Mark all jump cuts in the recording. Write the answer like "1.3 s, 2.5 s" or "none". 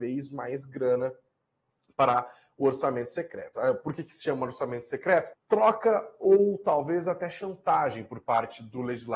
5.3 s